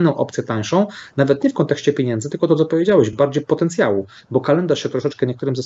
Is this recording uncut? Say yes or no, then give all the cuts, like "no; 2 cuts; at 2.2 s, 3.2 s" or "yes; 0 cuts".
yes; 0 cuts